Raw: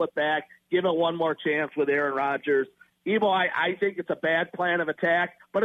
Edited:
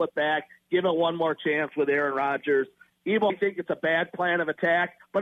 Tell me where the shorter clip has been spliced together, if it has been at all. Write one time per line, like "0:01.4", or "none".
0:03.3